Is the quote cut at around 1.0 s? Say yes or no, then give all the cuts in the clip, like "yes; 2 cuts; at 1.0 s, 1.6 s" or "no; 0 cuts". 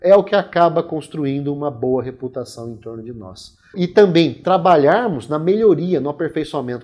no; 1 cut; at 3.7 s